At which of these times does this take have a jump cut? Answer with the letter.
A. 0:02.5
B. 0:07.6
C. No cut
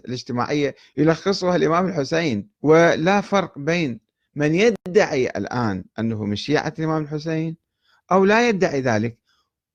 A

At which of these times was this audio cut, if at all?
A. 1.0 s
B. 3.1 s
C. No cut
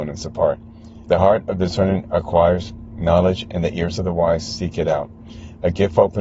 A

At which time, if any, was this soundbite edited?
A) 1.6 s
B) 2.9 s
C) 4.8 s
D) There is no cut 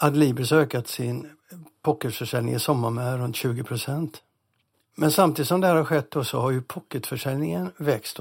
C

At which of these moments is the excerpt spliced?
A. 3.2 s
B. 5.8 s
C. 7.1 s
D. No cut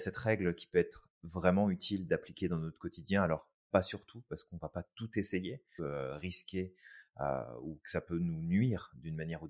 B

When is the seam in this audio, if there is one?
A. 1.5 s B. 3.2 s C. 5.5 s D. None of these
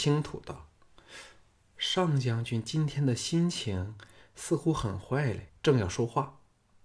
C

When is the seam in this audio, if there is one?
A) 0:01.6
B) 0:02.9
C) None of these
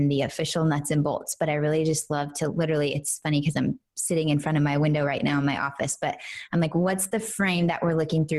C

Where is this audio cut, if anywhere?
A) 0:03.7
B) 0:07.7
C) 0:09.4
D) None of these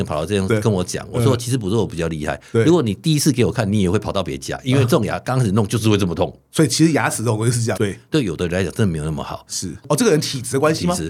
B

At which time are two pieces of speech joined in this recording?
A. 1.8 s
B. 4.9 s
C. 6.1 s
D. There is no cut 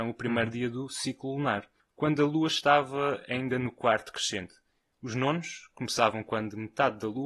A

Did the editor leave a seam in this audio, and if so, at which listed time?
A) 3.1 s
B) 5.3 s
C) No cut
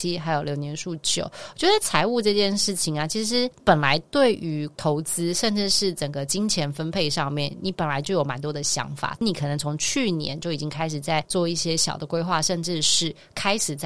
C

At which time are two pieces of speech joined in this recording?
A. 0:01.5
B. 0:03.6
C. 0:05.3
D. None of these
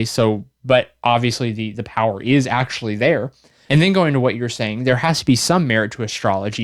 D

